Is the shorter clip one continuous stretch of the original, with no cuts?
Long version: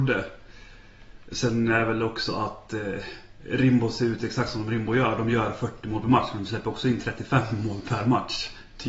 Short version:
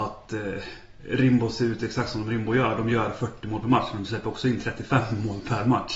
yes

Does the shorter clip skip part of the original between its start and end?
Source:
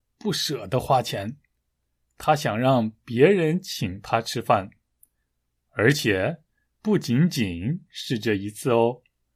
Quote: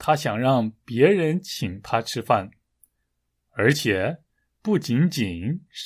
no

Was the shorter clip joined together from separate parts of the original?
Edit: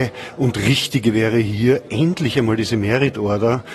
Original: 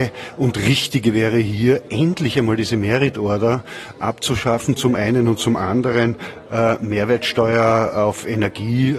no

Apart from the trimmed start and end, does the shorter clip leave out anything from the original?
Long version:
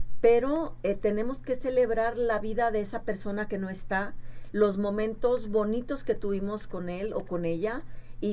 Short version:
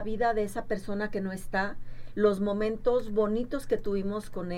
no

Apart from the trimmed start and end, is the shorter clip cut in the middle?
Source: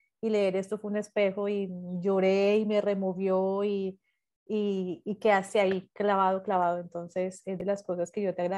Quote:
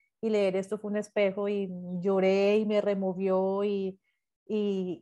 no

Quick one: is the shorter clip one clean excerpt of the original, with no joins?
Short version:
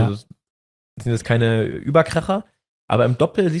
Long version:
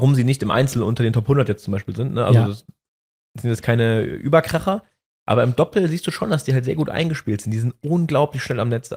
yes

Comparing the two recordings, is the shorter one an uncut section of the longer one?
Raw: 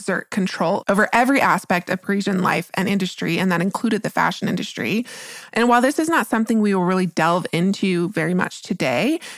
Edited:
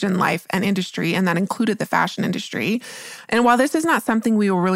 yes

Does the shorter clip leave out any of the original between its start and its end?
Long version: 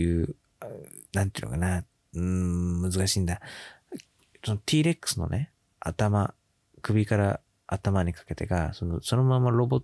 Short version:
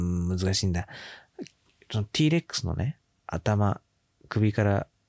no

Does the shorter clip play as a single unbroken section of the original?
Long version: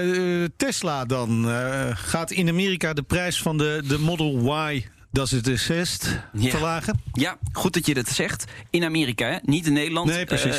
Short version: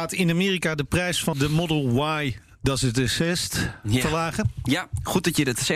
no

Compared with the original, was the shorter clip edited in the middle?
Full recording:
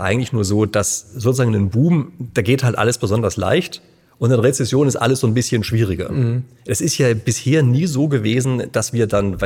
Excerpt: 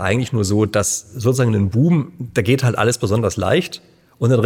no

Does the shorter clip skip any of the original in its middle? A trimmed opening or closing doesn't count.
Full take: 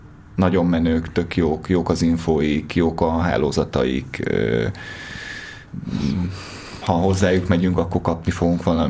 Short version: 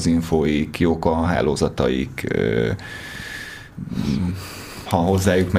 no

